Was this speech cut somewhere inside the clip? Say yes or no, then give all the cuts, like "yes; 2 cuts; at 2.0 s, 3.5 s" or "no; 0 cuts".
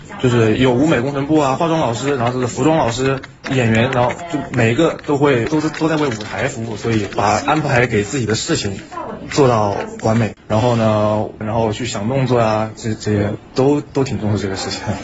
yes; 3 cuts; at 5.5 s, 10.4 s, 11.4 s